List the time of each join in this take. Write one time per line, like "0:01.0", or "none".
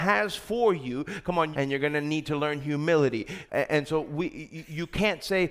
0:01.5
0:03.5